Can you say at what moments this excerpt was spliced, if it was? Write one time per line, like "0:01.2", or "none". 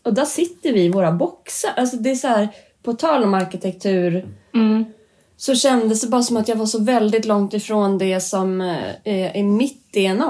none